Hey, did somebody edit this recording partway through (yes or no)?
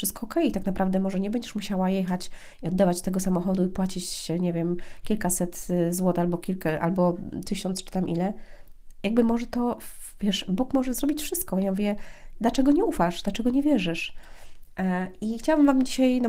no